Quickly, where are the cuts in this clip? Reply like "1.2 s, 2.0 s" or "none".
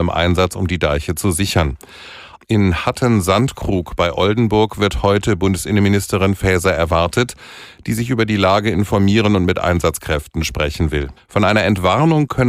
2.4 s, 11.2 s